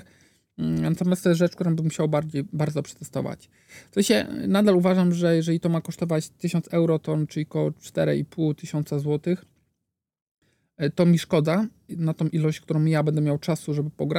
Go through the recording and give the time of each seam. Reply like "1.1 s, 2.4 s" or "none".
11.9 s